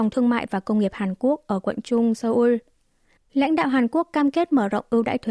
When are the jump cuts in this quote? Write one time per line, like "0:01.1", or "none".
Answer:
0:03.2